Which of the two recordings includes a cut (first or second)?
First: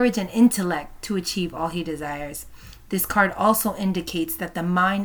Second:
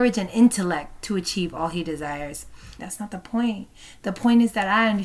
second